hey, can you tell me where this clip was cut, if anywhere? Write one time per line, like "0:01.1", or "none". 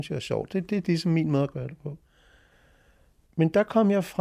none